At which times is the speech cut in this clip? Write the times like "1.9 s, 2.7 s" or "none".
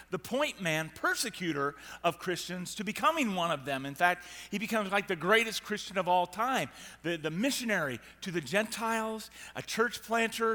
none